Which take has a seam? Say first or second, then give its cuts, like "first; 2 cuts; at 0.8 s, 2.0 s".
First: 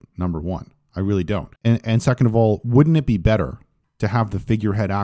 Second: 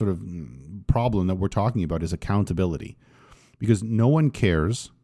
first; 1 cut; at 1.6 s